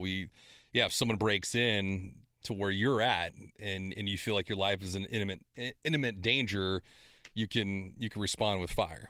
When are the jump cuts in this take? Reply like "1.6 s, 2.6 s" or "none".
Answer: none